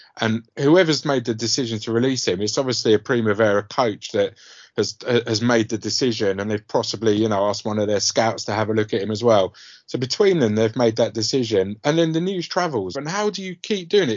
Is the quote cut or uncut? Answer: cut